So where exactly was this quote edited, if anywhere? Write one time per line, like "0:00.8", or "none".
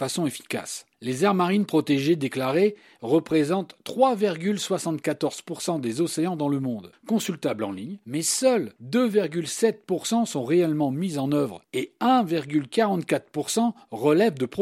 0:00.9
0:06.9